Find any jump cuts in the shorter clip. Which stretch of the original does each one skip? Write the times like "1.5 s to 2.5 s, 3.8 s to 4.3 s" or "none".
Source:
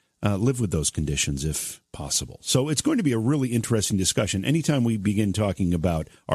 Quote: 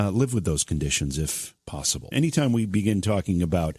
2.4 s to 4.4 s

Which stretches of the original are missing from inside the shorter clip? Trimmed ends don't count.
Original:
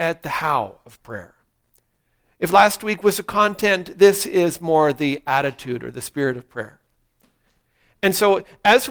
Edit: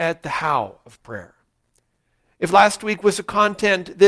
none

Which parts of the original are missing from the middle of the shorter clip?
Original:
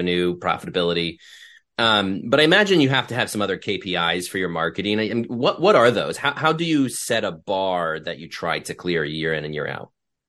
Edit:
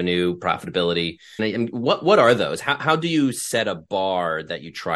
1.4 s to 5.0 s

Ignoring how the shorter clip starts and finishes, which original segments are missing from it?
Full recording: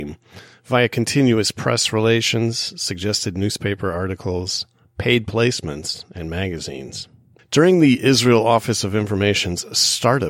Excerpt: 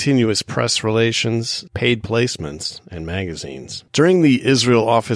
2.8 s to 4.9 s, 7.1 s to 7.5 s

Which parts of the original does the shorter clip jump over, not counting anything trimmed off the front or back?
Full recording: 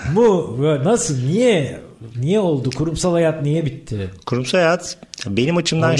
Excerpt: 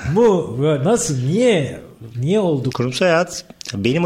2.7 s to 4.2 s

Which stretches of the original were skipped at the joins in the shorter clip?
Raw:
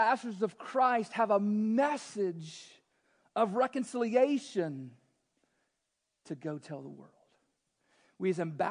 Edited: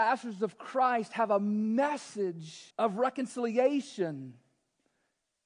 2.7 s to 3.3 s

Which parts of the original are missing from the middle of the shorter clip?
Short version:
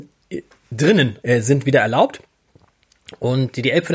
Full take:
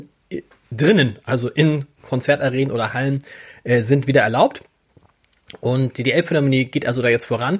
1.2 s to 3.6 s

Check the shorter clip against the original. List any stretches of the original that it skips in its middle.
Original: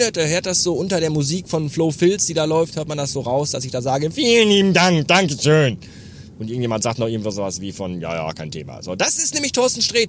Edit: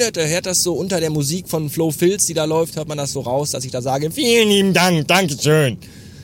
none

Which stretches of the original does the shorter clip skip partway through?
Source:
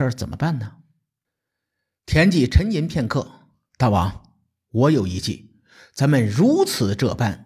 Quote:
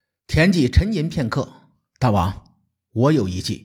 none

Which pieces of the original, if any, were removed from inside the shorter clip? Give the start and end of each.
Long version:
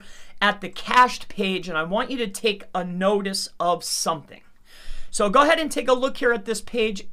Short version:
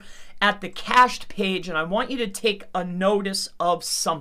none

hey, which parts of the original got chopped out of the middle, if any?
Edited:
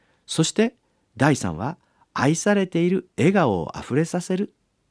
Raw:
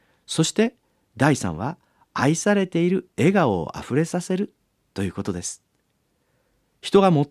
none

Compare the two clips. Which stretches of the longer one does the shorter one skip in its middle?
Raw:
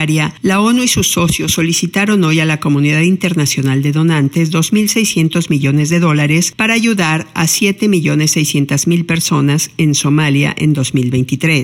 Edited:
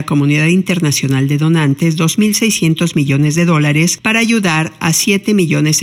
none

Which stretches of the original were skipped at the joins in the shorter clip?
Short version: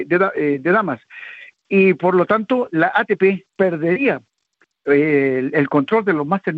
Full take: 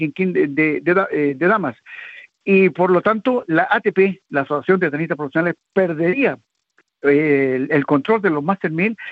4.2 s to 5.7 s

